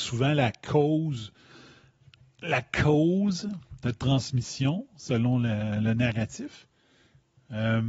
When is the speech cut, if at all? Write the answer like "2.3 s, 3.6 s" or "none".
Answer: none

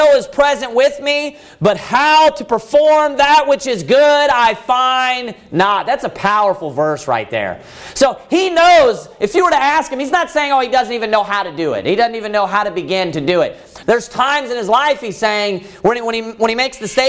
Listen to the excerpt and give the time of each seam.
13.8 s

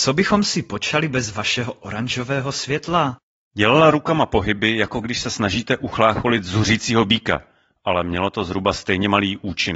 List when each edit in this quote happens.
3.4 s

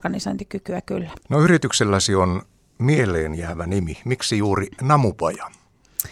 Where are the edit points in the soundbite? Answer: 1.2 s

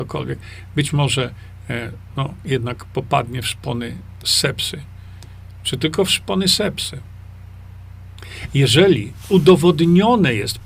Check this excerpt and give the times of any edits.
none

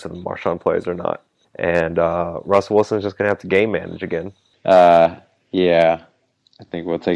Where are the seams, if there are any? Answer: 1.4 s

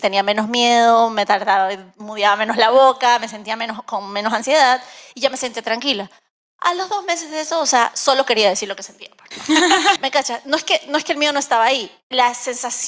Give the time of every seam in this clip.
10.0 s

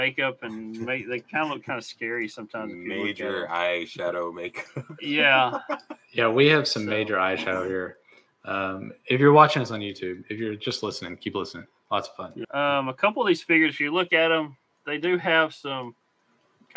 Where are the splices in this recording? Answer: 12.4 s

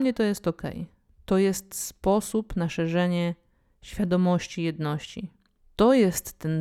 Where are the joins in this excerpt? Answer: none

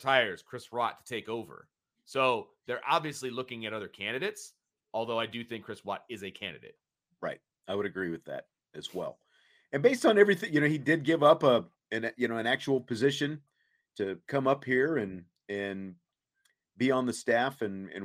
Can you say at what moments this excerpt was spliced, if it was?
none

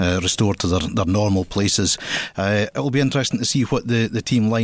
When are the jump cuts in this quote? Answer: none

